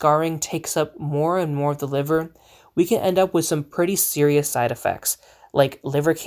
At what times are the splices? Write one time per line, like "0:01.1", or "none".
none